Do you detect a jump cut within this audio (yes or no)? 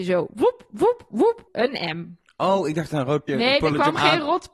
yes